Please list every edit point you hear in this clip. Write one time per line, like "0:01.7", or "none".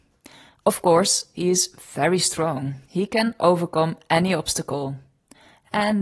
0:01.3
0:02.8